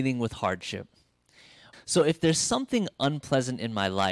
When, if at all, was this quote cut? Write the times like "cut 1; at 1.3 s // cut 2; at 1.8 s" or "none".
cut 1; at 1.7 s